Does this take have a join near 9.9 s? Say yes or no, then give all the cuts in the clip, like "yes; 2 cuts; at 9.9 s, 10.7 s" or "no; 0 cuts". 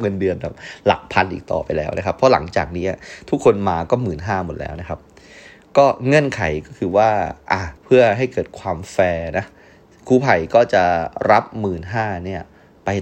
no; 1 cut; at 7.8 s